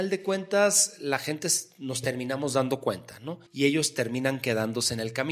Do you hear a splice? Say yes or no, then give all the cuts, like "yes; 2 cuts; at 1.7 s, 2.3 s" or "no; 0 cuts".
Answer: yes; 1 cut; at 3.5 s